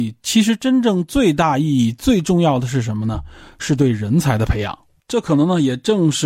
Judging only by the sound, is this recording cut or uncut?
cut